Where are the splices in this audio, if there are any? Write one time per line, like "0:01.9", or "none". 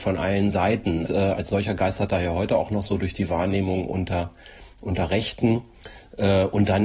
0:01.1